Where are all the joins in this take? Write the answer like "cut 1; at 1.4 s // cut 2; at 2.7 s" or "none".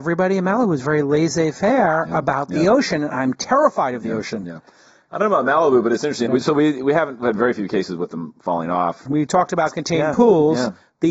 cut 1; at 6.3 s // cut 2; at 9.1 s